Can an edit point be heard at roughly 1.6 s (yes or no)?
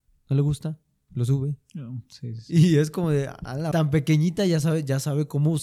no